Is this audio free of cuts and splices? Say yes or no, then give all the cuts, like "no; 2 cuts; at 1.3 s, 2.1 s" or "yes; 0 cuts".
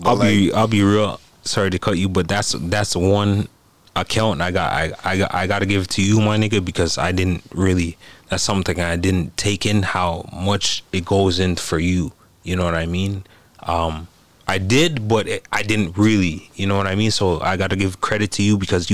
yes; 0 cuts